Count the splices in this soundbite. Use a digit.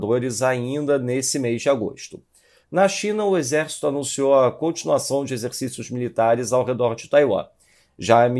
1